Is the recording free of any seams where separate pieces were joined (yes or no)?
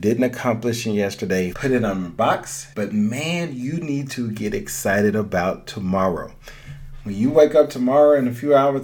no